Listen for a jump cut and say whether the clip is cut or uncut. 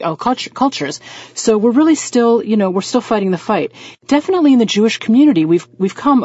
uncut